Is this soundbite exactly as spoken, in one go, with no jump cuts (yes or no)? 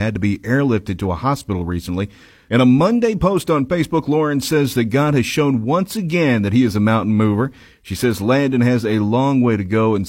no